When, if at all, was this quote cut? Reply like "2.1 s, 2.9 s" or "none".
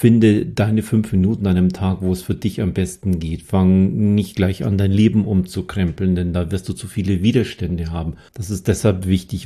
8.3 s